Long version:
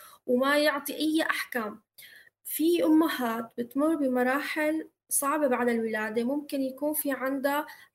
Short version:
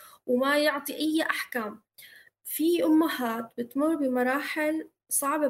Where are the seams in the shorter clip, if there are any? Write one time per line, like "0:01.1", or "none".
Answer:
none